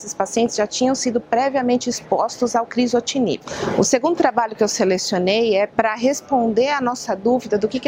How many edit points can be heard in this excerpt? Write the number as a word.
one